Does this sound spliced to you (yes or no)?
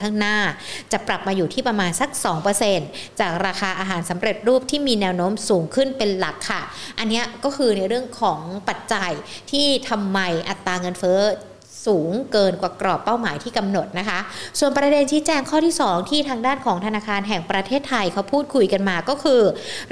no